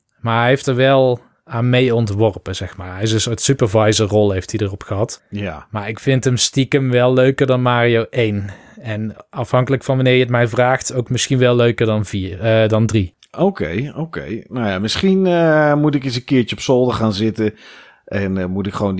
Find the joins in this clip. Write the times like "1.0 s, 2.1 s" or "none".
none